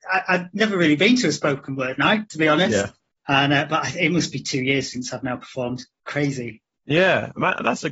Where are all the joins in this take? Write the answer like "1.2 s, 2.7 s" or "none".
3.2 s

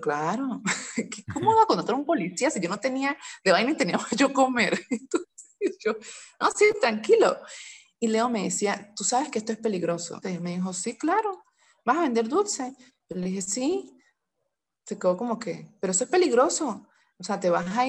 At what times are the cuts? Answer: 10.2 s

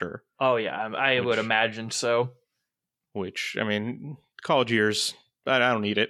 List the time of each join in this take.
none

